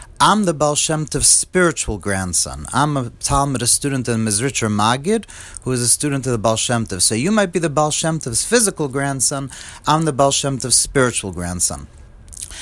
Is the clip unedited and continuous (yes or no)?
yes